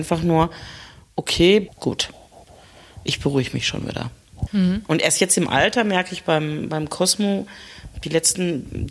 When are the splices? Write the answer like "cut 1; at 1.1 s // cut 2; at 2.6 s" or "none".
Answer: cut 1; at 1.7 s // cut 2; at 4.5 s